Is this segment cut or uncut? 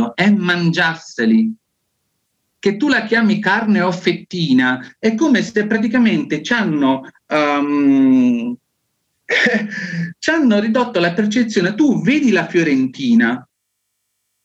uncut